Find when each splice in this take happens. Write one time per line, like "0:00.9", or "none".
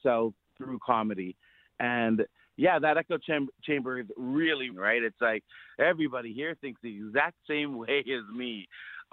0:04.7